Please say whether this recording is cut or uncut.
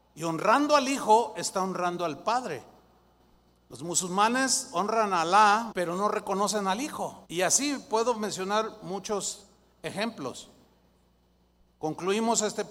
cut